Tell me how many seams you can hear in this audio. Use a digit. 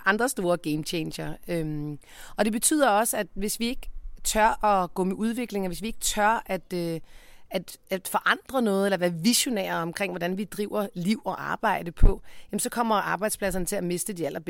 0